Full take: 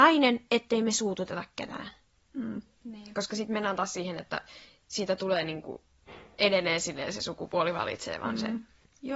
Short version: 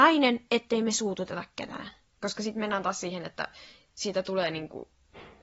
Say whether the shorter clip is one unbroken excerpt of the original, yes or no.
no